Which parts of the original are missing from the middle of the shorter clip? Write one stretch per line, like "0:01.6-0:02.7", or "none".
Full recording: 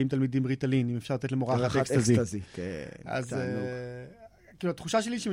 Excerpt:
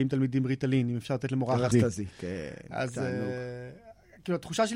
0:01.7-0:02.1

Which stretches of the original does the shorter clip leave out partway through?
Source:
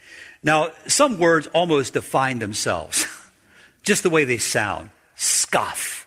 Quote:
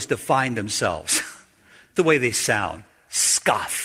0:03.8-0:04.0

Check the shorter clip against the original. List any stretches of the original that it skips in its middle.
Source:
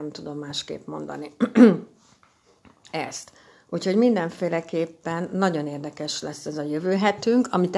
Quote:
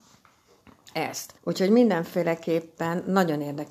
0:03.4-0:03.6

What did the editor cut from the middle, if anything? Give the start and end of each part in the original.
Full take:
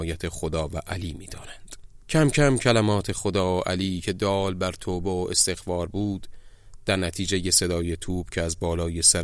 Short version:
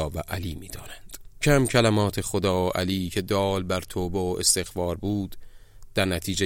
0:02.0-0:02.3

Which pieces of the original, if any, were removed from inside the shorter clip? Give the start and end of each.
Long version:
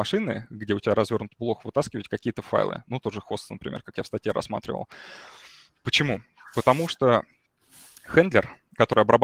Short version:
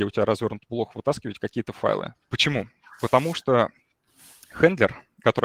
0:02.8-0:05.7

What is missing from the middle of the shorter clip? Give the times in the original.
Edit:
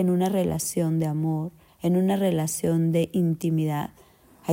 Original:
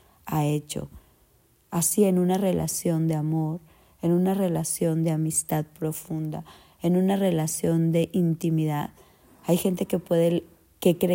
0:03.8-0:06.7

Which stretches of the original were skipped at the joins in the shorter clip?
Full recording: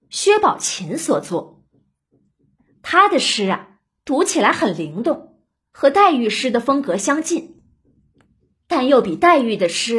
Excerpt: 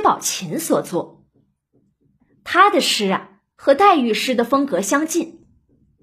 0:03.9-0:05.7

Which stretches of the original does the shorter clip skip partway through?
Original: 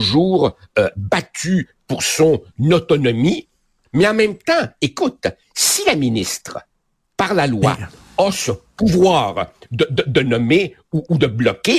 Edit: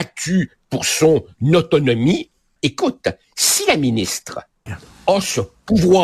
0:03.7-0:04.8
0:06.8-0:07.8

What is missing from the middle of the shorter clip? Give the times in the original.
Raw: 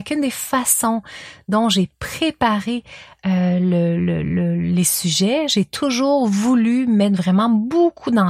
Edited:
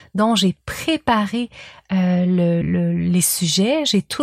0:04.0-0:04.2

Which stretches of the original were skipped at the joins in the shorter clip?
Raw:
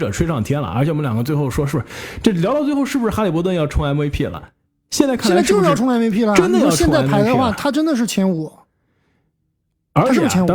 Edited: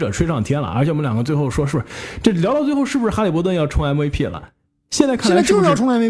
none

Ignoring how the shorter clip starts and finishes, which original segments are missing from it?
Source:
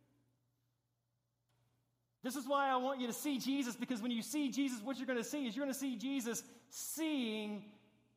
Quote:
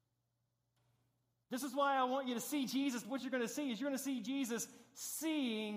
0:03.8-0:04.8

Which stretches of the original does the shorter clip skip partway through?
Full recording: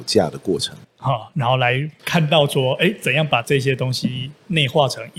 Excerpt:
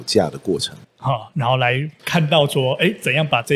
none

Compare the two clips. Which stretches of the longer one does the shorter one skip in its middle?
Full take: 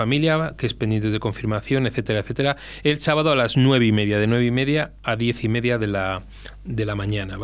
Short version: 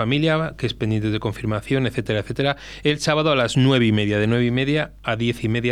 none

